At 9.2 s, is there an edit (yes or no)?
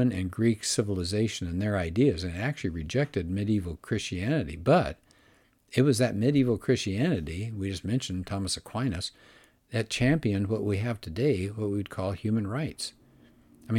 no